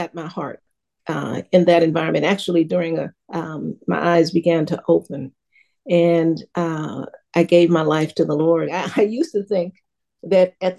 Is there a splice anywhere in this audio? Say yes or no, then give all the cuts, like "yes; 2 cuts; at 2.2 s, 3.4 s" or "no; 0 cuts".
yes; 2 cuts; at 3.2 s, 8.7 s